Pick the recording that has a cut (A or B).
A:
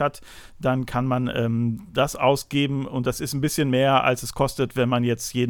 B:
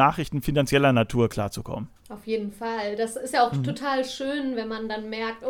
B